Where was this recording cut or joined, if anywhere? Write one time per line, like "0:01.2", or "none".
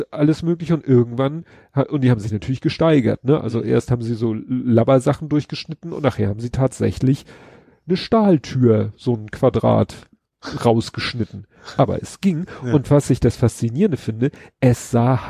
0:11.8